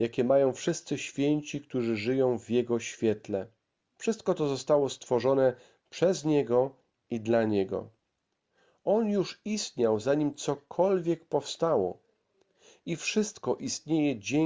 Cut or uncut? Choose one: cut